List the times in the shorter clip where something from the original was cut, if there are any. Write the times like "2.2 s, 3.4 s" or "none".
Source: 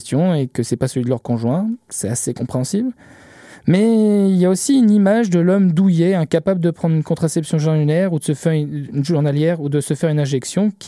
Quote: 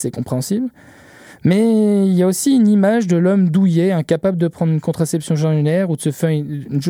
none